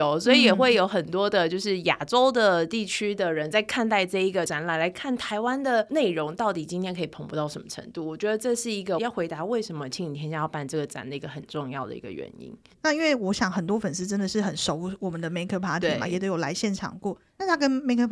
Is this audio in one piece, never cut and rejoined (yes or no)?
yes